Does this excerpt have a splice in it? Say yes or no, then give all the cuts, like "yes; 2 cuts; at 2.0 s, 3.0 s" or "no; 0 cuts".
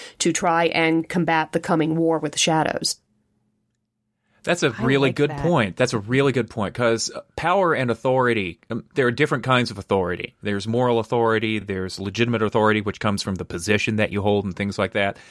no; 0 cuts